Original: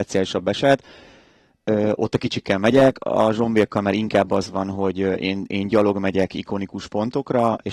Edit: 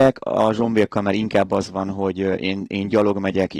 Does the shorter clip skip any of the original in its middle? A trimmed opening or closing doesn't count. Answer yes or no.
no